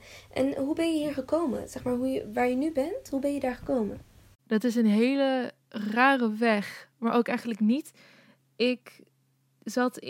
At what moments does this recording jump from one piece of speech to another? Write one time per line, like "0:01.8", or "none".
none